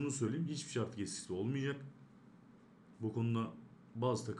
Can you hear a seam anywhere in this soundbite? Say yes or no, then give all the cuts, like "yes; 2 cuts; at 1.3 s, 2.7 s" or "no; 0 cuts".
no; 0 cuts